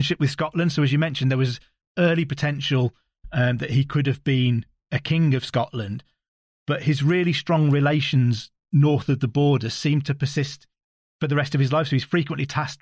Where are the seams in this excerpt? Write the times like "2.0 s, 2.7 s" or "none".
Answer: none